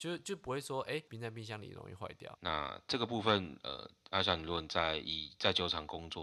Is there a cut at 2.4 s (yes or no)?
yes